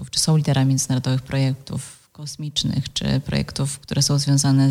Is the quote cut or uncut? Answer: uncut